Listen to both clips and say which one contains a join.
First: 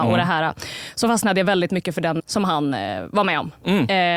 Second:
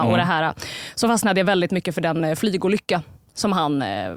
first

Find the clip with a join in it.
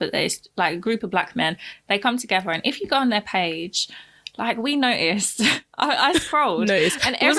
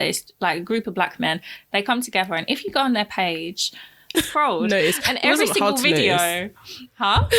second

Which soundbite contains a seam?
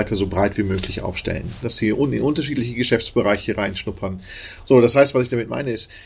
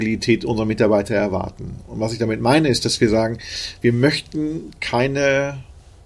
first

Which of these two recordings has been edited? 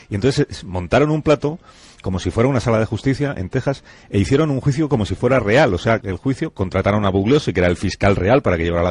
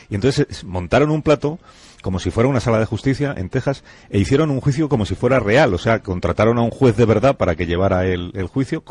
first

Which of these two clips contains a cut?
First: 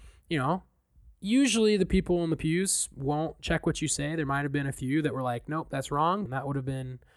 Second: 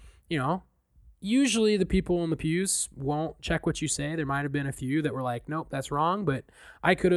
first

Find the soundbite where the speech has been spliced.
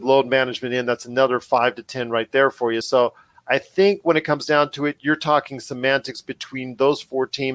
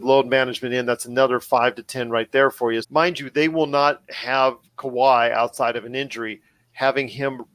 second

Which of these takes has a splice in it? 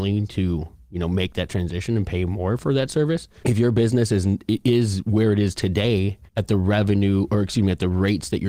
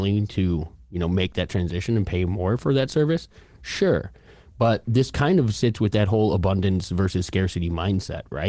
first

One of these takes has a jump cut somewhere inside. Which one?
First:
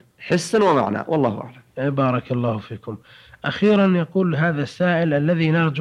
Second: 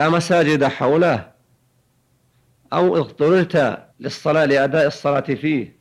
second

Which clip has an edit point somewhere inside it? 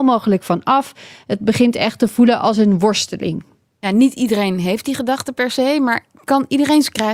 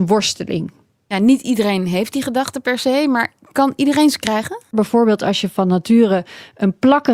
second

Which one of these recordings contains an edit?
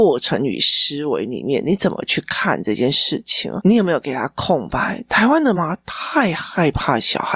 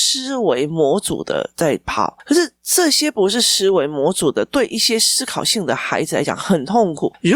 first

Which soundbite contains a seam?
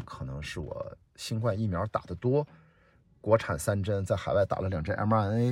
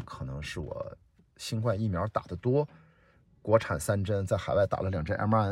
first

